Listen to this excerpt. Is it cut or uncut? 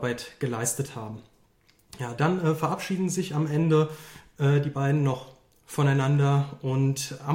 uncut